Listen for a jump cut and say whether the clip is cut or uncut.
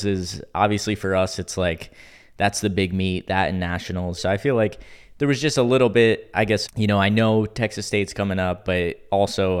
cut